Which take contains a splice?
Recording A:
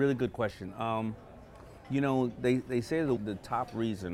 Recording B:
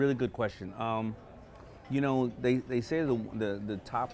A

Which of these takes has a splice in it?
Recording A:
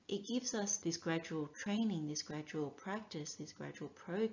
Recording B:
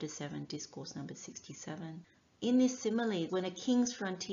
B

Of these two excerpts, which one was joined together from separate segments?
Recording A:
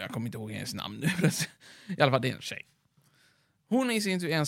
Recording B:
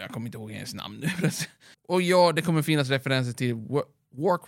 B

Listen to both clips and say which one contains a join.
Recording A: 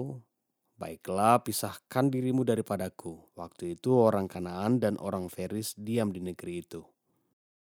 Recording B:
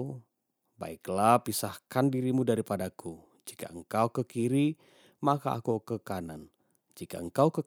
A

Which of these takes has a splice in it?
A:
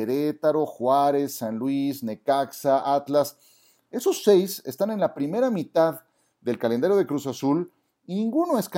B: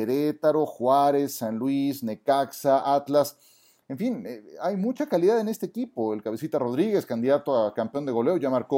B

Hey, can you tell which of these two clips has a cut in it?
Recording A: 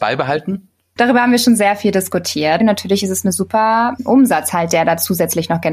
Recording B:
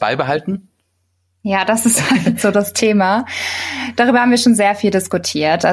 A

